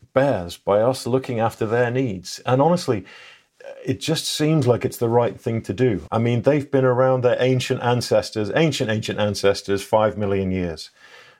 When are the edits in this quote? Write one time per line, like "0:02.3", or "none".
0:06.1